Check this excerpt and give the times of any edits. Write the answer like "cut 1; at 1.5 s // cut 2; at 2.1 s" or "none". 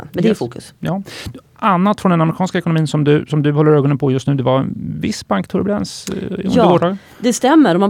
none